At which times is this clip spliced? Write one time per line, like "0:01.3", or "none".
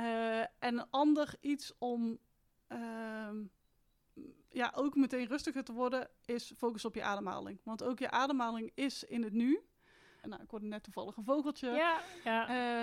0:10.2